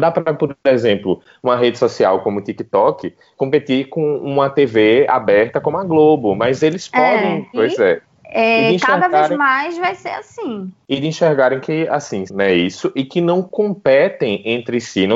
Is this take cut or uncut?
cut